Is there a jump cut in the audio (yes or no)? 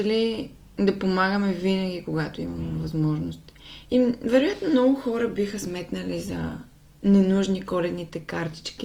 yes